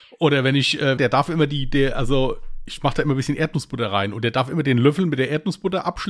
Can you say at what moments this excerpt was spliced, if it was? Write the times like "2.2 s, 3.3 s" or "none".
1.0 s